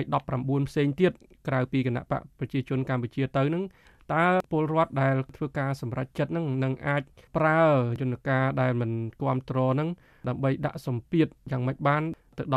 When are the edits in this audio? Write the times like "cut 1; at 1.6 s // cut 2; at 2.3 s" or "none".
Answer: none